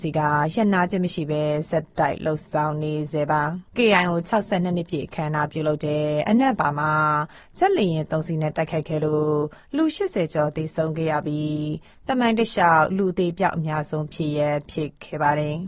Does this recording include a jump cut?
yes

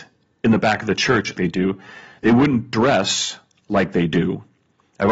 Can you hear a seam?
yes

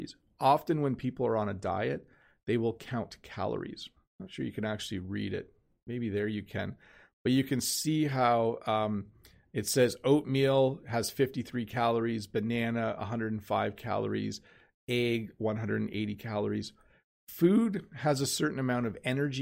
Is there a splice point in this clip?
yes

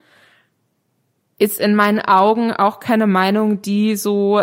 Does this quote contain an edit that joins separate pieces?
no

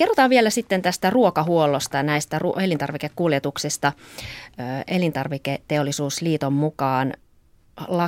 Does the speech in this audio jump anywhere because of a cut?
no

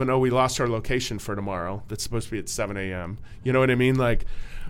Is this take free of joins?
yes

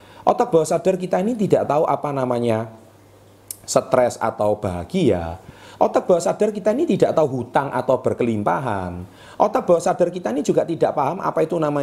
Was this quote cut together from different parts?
no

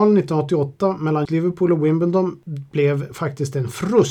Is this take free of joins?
no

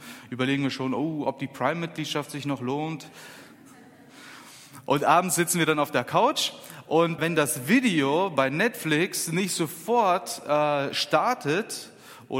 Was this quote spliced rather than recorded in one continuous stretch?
yes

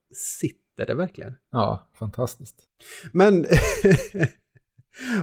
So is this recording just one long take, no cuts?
yes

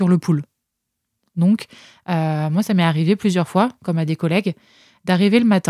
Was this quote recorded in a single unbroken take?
yes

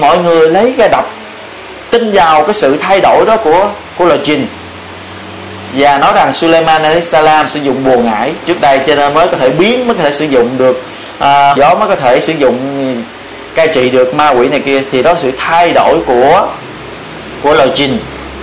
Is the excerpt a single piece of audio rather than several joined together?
no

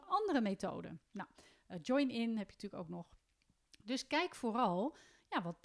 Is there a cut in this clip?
yes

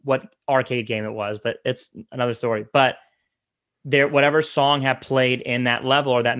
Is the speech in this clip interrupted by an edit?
no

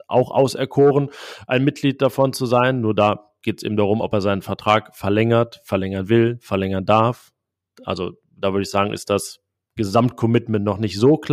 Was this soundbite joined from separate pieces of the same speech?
no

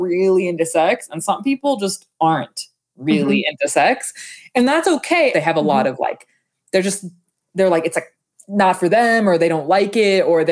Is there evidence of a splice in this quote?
yes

